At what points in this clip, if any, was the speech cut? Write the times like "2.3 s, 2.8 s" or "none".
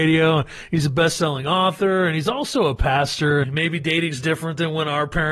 3.4 s